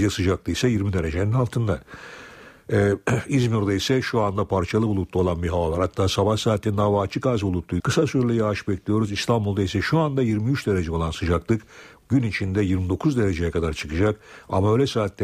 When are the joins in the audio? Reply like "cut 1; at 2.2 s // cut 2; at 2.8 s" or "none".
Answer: cut 1; at 7.8 s

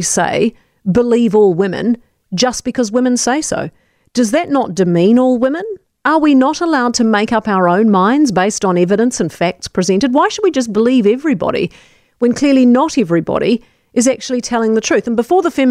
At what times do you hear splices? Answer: none

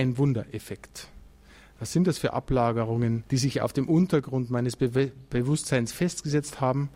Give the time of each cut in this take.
cut 1; at 3.3 s

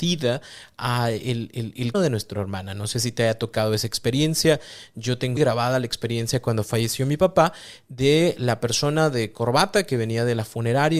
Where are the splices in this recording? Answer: cut 1; at 1.9 s // cut 2; at 5.4 s

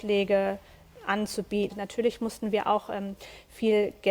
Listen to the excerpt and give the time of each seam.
cut 1; at 1.7 s

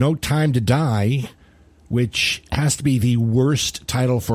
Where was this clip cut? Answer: none

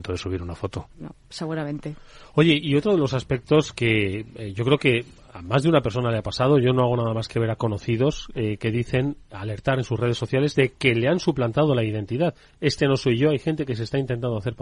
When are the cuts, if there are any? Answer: cut 1; at 0.9 s

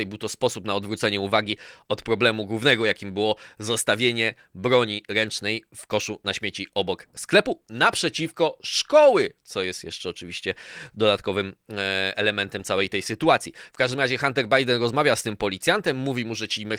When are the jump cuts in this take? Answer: none

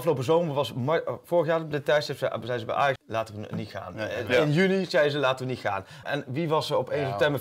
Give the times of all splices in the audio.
cut 1; at 3.0 s // cut 2; at 6.0 s

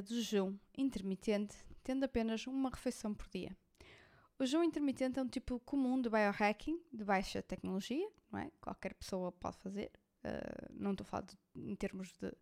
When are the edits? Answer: none

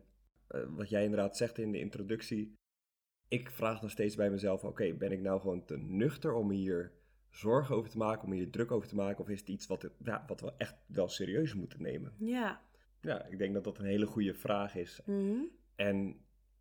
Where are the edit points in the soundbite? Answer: cut 1; at 12.8 s // cut 2; at 15.0 s

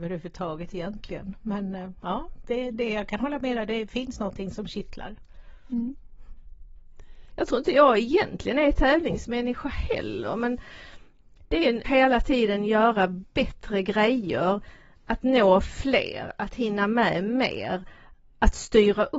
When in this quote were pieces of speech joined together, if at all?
cut 1; at 7.3 s // cut 2; at 11.8 s

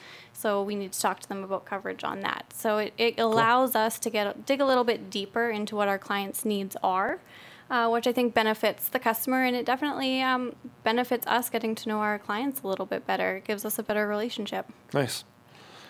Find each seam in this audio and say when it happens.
none

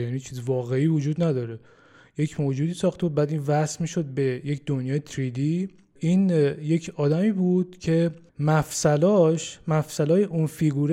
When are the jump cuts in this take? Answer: none

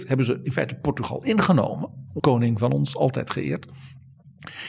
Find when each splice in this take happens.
cut 1; at 2.2 s

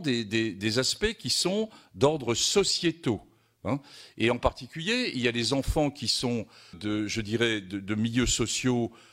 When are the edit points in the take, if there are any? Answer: cut 1; at 6.7 s

